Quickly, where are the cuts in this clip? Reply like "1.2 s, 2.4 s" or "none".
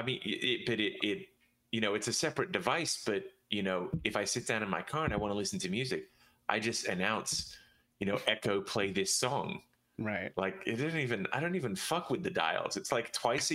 none